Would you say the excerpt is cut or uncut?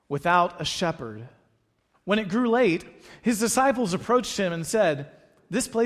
cut